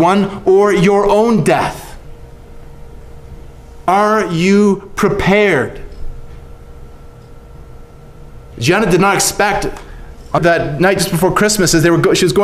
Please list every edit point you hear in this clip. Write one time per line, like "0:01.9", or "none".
0:08.5
0:10.4